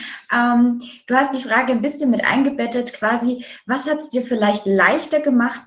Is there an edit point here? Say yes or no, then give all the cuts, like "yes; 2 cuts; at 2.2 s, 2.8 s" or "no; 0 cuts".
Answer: no; 0 cuts